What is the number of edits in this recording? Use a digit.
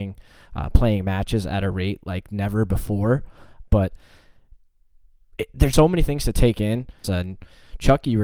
3